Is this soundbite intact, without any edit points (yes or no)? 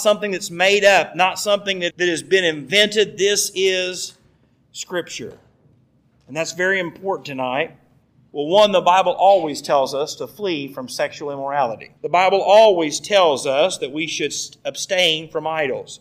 no